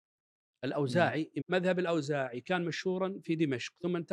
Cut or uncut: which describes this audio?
cut